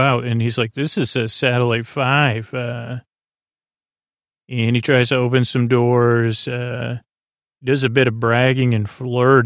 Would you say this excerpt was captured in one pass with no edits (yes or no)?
yes